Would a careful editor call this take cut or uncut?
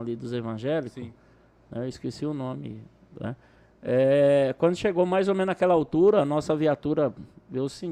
uncut